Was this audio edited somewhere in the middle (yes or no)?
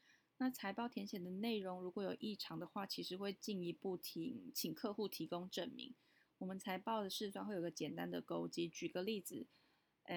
no